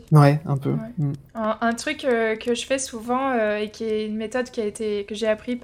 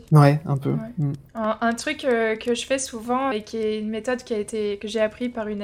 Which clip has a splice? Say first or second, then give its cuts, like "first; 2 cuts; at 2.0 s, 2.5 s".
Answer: second; 1 cut; at 3.3 s